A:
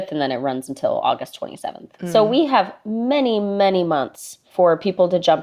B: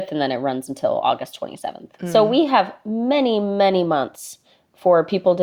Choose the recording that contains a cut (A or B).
A